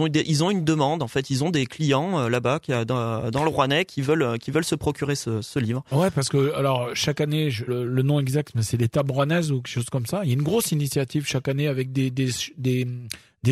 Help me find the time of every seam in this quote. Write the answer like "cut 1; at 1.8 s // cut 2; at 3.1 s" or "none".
cut 1; at 7.7 s